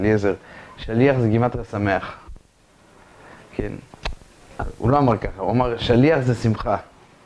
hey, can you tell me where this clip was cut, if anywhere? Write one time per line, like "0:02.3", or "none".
none